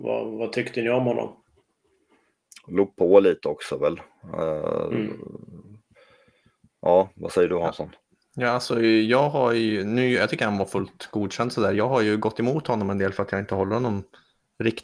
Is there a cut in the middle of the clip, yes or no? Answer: no